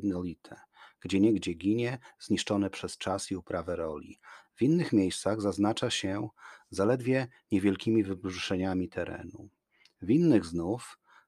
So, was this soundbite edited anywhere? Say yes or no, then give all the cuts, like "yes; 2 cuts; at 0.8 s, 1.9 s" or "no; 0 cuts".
no; 0 cuts